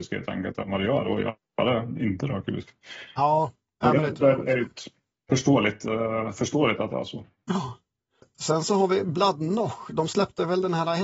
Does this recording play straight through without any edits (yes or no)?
yes